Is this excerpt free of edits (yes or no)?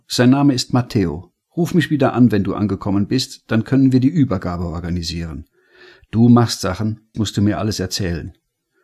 no